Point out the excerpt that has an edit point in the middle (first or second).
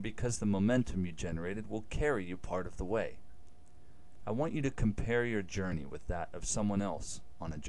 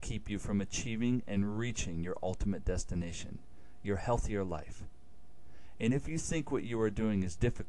first